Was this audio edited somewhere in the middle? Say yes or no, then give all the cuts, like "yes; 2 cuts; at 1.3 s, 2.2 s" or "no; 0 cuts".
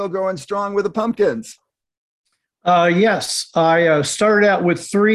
no; 0 cuts